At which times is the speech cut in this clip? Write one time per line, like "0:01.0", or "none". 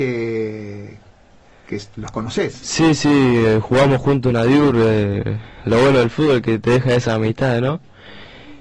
none

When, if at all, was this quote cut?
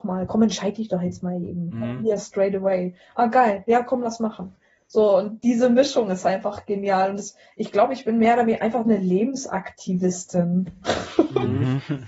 none

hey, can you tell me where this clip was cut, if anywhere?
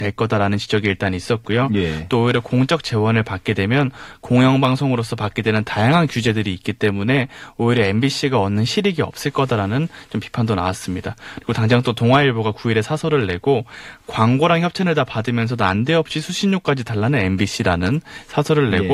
none

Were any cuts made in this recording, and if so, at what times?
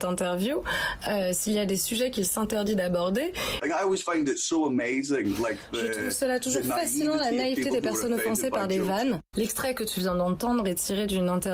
0:03.6
0:09.3

